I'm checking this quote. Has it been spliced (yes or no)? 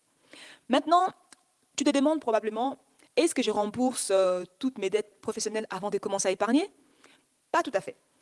no